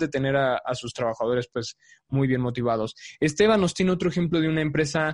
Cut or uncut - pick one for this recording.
uncut